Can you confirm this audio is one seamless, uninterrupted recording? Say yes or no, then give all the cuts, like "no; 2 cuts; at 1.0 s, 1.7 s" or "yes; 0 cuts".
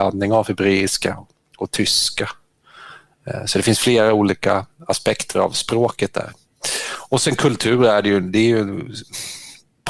yes; 0 cuts